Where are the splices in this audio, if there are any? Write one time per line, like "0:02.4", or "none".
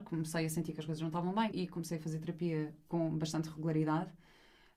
0:01.5

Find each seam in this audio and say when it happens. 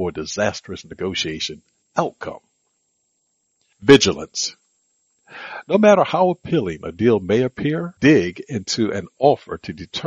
0:08.0

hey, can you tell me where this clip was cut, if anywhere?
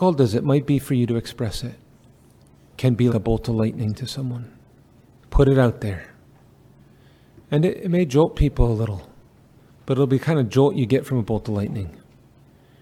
0:03.1
0:05.2

